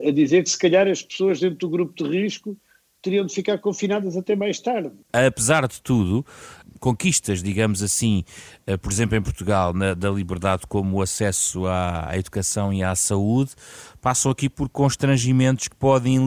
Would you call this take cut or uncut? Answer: uncut